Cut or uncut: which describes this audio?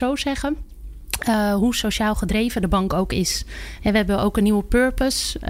uncut